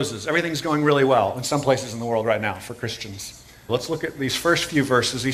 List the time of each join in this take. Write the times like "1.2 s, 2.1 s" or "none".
3.7 s